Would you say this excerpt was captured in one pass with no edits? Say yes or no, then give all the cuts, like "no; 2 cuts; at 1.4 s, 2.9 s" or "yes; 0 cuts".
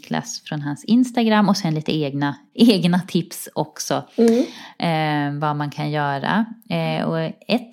no; 1 cut; at 2.5 s